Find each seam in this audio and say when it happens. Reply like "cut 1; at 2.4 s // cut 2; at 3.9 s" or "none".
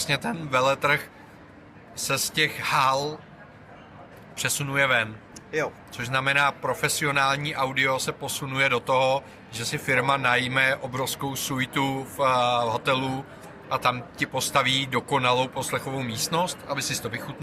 none